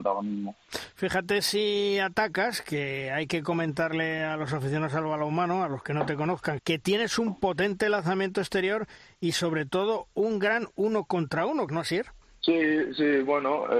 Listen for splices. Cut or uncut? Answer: cut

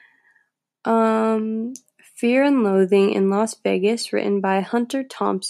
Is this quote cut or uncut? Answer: uncut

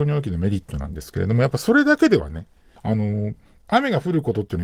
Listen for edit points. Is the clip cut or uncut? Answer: cut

